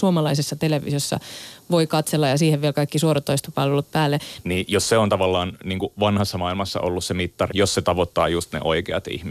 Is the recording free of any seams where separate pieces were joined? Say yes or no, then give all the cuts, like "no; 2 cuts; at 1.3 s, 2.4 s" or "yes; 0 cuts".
no; 2 cuts; at 4.4 s, 7.5 s